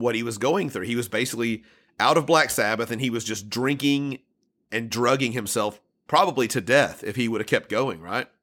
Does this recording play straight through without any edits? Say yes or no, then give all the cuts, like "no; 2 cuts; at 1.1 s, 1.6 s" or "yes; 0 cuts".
yes; 0 cuts